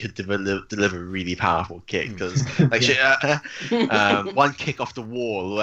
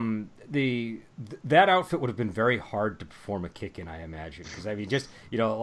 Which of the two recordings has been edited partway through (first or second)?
first